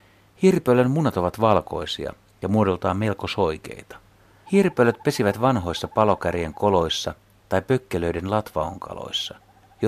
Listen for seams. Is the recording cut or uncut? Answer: cut